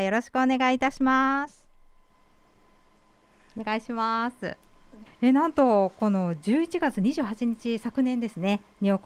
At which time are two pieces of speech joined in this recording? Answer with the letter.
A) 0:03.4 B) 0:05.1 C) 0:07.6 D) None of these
B